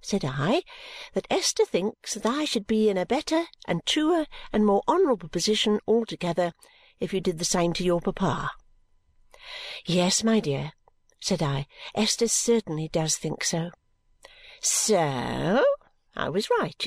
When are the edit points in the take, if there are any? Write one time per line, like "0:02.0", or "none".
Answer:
none

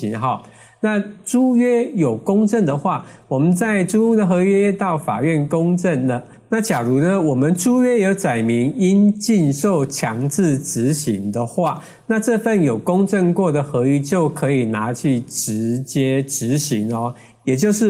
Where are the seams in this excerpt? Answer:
none

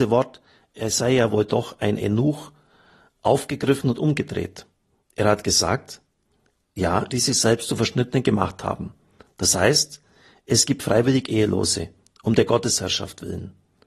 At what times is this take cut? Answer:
0:07.1

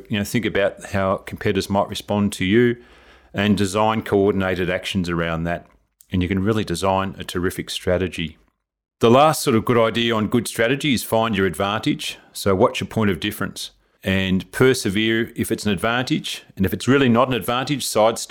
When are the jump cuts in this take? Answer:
none

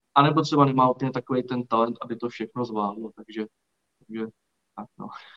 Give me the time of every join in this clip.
none

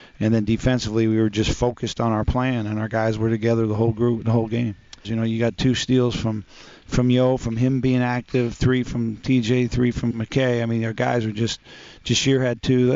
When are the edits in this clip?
0:05.0

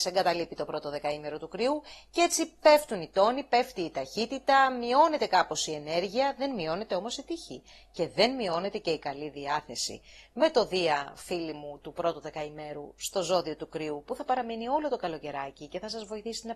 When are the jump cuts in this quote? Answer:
none

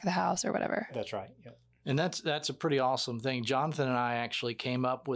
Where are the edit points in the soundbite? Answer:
none

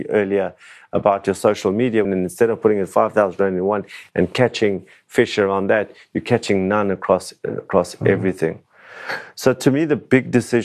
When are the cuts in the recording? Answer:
0:02.0

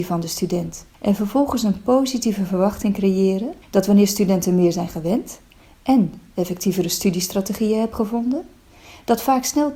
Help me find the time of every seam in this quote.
0:00.9
0:03.6

